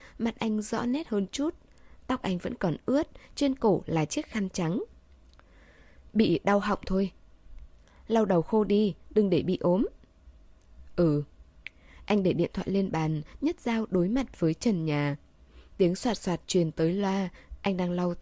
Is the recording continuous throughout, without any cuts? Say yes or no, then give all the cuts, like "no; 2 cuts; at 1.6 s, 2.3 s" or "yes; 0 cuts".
yes; 0 cuts